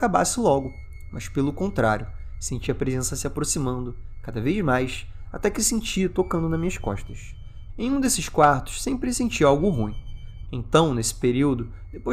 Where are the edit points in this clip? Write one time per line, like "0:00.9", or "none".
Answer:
0:07.7
0:10.4

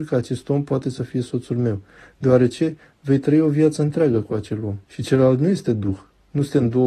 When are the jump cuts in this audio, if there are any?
0:04.8

